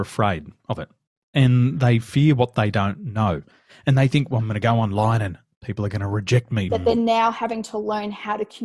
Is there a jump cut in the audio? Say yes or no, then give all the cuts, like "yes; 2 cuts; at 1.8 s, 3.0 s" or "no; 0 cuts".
yes; 1 cut; at 6.7 s